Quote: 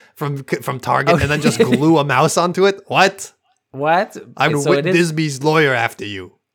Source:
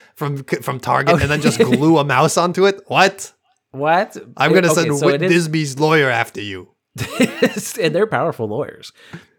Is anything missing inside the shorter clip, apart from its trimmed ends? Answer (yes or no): yes